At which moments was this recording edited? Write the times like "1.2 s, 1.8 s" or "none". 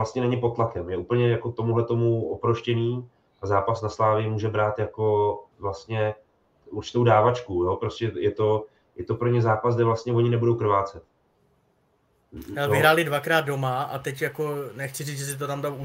5.5 s